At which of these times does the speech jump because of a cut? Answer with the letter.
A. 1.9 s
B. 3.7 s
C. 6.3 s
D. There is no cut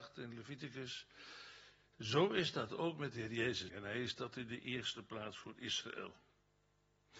B